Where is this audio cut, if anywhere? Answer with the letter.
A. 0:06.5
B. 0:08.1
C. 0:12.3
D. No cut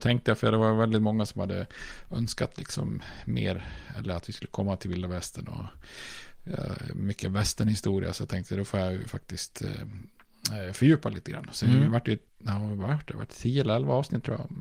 C